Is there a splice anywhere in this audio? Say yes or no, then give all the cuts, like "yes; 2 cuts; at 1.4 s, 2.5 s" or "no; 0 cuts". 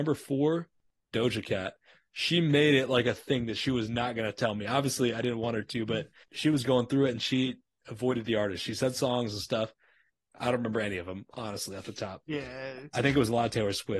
no; 0 cuts